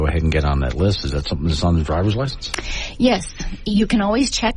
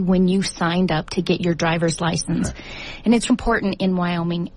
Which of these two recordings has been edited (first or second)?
second